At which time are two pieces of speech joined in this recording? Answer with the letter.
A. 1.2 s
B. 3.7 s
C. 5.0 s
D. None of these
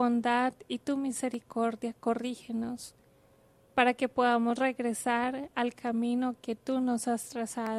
D